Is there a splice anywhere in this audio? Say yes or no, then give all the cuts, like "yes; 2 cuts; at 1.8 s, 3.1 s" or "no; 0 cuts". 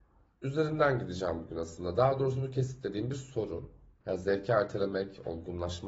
yes; 1 cut; at 4.0 s